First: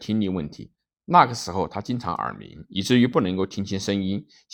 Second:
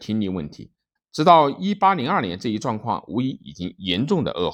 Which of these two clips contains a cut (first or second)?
second